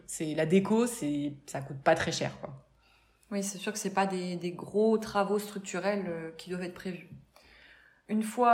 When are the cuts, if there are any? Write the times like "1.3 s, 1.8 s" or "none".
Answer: none